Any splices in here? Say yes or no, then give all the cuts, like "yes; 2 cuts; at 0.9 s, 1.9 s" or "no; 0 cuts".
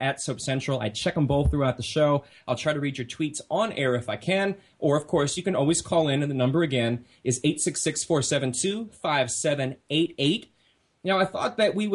no; 0 cuts